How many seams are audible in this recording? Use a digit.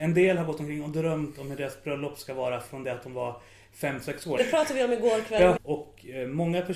2